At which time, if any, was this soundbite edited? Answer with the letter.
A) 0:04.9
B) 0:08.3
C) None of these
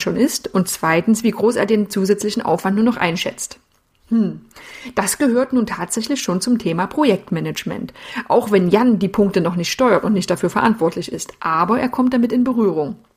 C